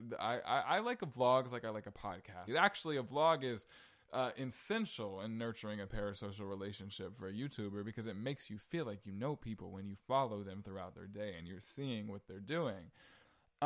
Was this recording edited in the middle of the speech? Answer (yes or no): yes